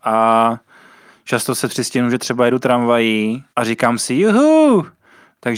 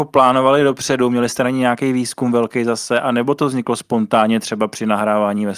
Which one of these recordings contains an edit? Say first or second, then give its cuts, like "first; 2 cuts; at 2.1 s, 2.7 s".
first; 1 cut; at 3.5 s